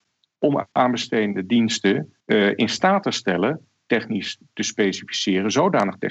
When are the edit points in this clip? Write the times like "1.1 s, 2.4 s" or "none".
2.2 s